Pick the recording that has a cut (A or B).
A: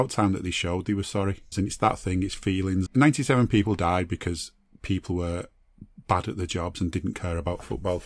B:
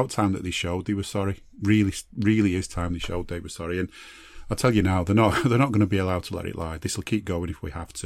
A